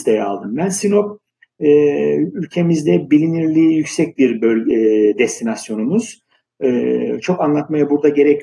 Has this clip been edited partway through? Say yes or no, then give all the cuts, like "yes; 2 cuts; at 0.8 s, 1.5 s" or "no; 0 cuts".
no; 0 cuts